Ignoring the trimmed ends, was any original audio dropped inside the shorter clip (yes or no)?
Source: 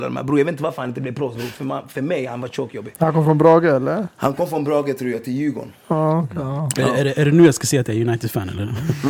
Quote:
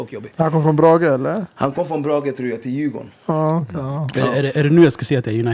no